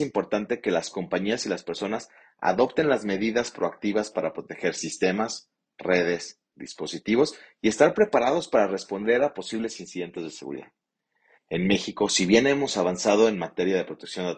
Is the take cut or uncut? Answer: cut